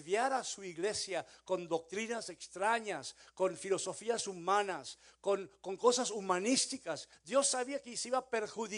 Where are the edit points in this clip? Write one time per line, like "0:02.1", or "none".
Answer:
0:07.1